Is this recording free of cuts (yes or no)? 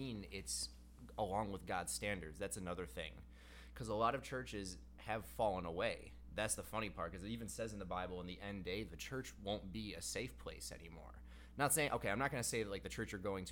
yes